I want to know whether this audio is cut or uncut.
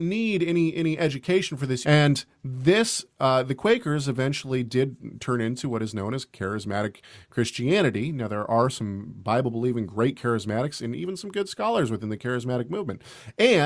cut